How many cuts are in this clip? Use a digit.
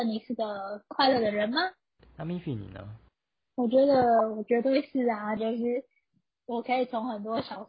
2